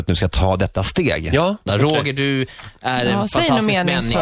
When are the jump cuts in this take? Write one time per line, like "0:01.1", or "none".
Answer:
0:01.7

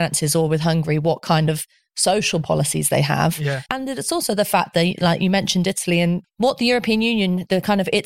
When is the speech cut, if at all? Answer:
0:03.7
0:06.2

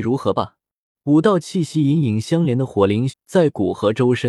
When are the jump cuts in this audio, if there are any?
0:00.9
0:03.1

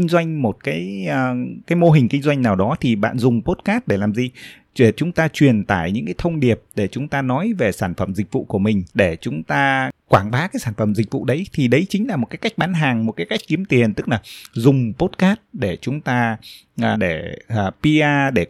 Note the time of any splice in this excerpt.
0:08.9
0:16.9

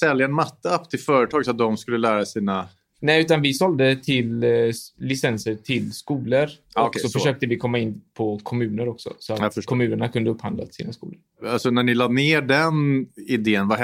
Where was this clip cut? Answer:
none

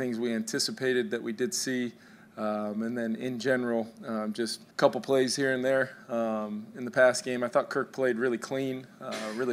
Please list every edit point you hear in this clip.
0:04.7

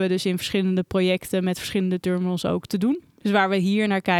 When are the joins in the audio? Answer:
0:03.2

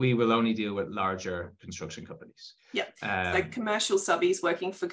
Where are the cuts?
none

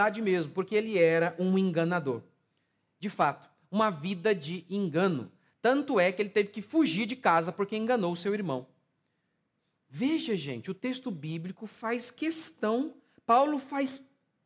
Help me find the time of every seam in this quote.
none

